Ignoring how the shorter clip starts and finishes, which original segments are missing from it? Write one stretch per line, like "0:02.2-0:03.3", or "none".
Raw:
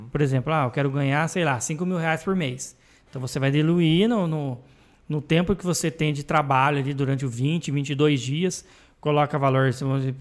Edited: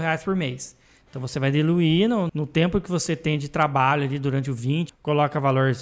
0:04.3-0:05.0
0:07.6-0:08.9